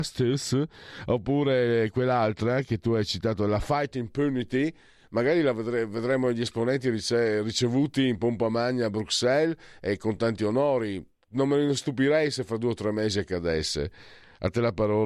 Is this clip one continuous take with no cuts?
yes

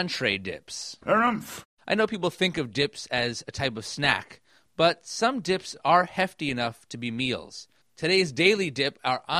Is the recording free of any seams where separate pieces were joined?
no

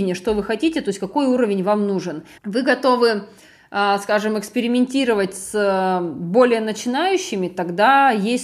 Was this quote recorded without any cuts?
no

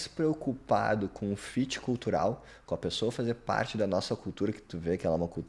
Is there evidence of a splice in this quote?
no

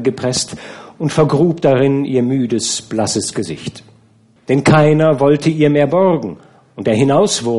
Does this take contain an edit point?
yes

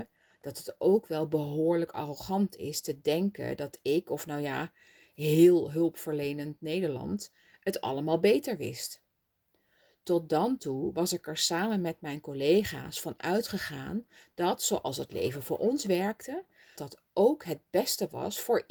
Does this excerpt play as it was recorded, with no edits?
no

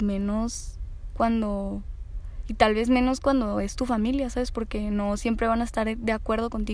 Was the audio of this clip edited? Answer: no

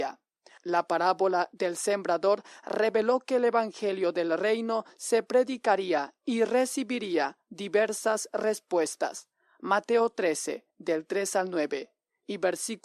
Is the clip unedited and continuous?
yes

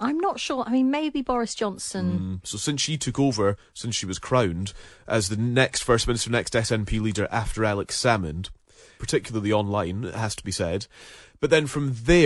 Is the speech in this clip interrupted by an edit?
yes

